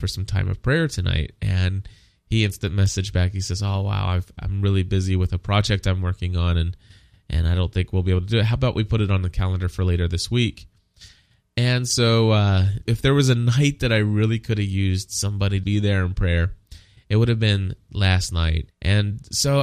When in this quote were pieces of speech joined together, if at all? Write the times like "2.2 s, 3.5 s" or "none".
12.9 s, 15.6 s, 18.7 s